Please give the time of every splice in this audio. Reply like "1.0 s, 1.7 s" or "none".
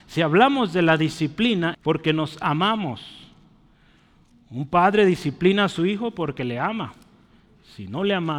1.7 s